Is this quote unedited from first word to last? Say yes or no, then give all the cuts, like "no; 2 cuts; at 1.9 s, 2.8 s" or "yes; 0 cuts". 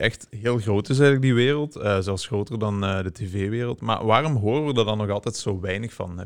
yes; 0 cuts